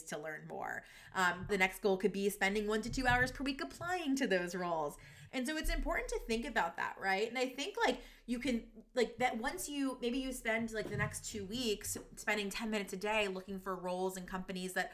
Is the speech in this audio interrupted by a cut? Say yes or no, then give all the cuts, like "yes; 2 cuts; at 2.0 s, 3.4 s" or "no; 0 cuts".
yes; 2 cuts; at 1.5 s, 5.3 s